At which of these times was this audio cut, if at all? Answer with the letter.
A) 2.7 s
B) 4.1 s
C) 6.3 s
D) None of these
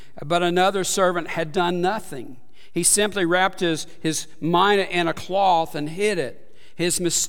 D